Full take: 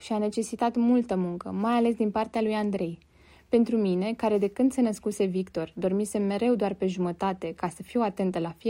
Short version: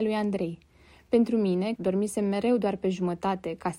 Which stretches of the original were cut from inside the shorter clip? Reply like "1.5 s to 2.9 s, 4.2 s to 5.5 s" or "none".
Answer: 4.2 s to 5.7 s